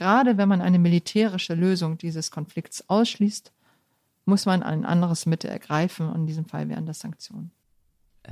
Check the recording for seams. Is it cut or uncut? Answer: uncut